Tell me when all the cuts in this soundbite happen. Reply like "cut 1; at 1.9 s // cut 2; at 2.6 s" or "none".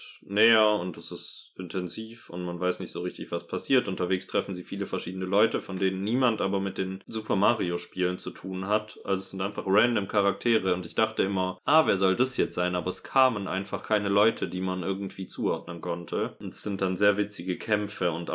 none